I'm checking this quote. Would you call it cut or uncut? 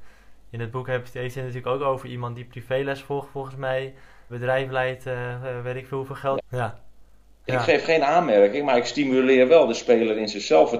cut